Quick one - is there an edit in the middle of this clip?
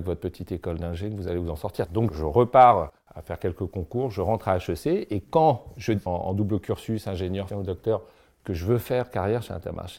yes; 3 cuts; at 1.9 s, 6.1 s, 7.5 s

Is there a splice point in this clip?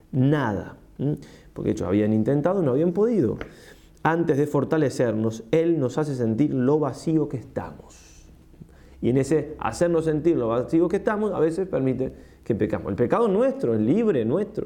no; 0 cuts

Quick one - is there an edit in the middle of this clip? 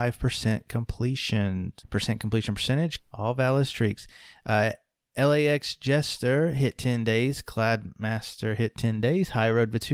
yes; 2 cuts; at 1.8 s, 3.0 s

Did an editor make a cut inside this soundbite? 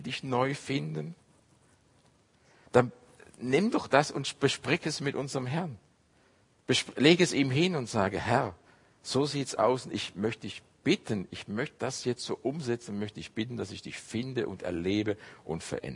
yes; 1 cut; at 2.7 s

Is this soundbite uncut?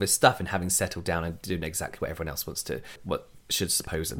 no; 1 cut; at 3.0 s

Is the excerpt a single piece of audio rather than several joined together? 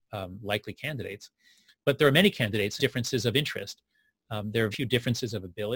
no; 2 cuts; at 2.8 s, 4.7 s

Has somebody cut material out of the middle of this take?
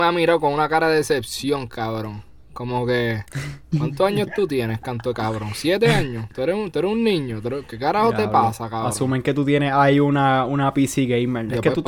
no; 0 cuts

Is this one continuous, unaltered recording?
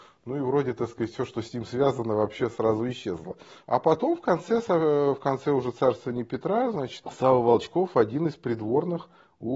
no; 2 cuts; at 3.6 s, 7.0 s

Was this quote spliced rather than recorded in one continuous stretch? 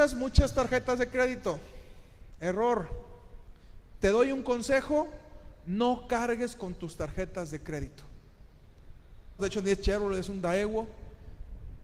yes; 1 cut; at 9.4 s

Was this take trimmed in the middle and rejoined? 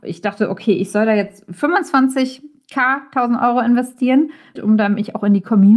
yes; 1 cut; at 4.6 s

